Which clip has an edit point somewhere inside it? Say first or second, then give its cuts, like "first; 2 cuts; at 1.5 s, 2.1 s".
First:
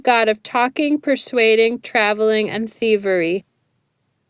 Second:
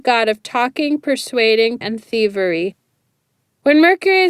second; 1 cut; at 1.8 s